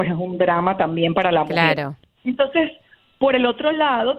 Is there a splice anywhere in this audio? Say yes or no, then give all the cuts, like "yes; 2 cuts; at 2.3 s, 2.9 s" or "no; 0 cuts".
no; 0 cuts